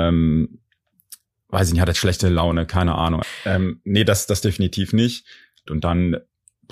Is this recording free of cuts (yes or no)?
no